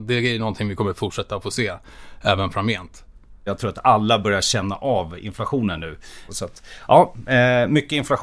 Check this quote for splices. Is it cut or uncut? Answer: cut